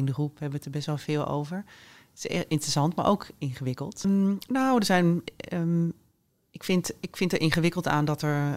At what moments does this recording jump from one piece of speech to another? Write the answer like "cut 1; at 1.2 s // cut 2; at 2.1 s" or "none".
cut 1; at 4.0 s